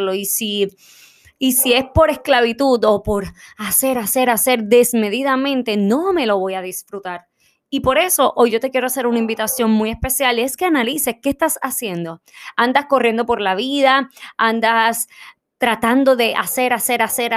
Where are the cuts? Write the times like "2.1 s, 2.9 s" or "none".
none